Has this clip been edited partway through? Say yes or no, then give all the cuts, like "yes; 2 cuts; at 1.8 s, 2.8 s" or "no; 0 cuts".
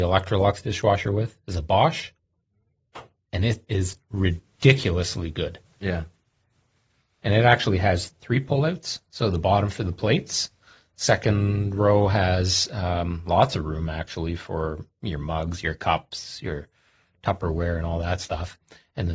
yes; 1 cut; at 8.1 s